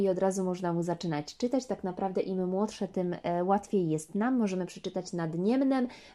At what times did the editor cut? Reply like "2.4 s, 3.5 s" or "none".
none